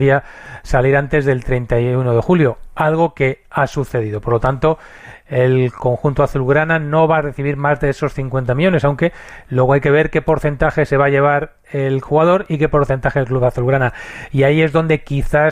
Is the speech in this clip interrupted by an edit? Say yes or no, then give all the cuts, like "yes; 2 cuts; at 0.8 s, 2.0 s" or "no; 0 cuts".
no; 0 cuts